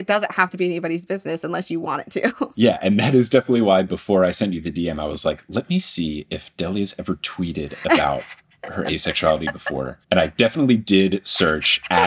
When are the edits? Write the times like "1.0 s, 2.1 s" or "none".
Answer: 10.0 s